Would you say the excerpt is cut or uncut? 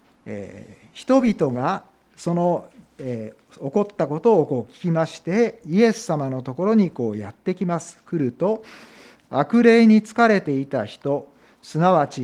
uncut